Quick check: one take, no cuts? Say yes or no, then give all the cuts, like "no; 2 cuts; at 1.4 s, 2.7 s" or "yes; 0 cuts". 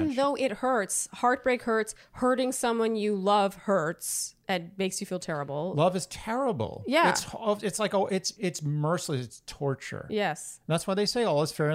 no; 1 cut; at 8.3 s